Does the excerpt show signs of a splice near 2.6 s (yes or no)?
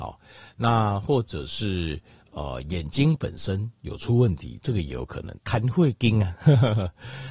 no